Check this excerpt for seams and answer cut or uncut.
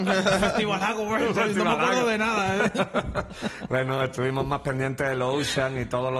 uncut